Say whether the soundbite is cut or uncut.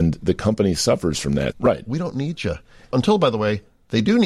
cut